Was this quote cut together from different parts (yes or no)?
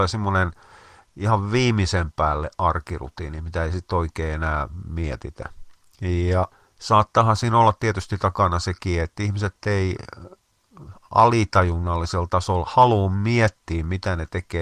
no